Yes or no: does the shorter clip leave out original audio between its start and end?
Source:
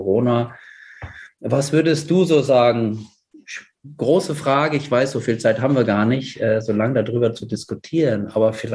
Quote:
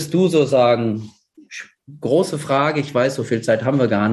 no